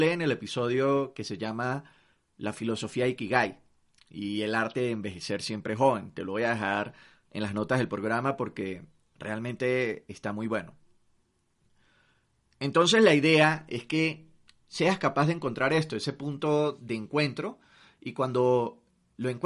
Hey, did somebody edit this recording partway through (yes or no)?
no